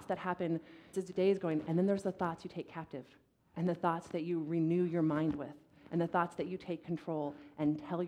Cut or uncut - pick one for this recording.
cut